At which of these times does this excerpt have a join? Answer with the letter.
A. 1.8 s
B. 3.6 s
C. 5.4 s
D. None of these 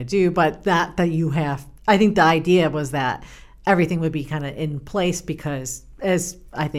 A